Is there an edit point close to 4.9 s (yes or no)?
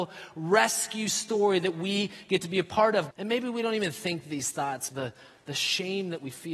yes